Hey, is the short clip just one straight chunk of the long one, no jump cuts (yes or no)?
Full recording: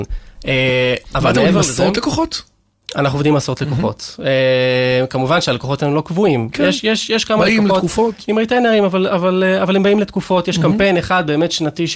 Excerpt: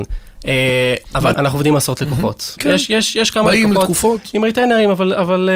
no